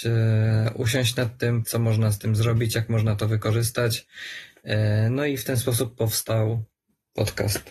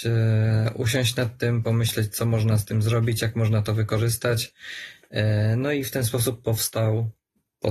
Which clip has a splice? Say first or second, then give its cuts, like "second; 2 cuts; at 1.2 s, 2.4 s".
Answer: first; 1 cut; at 1.6 s